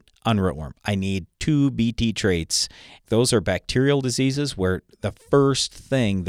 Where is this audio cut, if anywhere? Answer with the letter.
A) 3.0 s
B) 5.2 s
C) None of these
A